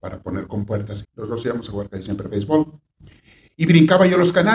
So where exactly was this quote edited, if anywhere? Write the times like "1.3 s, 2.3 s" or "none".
1.0 s